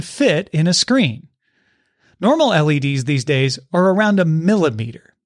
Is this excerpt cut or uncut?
uncut